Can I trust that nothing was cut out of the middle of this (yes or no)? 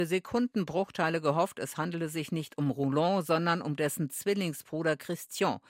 yes